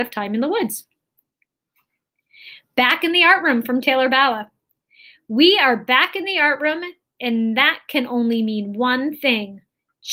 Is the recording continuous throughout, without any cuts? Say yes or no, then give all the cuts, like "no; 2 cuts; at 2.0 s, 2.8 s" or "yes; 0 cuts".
yes; 0 cuts